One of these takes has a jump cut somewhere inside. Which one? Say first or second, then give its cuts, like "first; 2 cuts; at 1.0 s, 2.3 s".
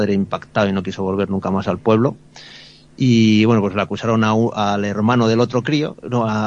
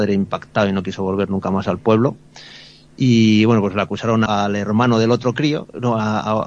second; 1 cut; at 4.3 s